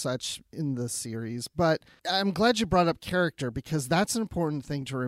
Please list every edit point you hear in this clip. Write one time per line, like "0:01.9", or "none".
0:02.0